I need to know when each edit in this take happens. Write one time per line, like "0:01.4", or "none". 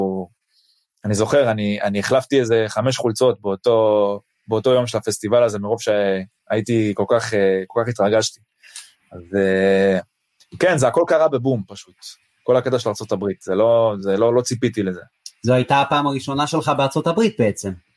none